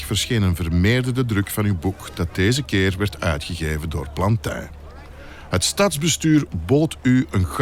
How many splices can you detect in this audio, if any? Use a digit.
0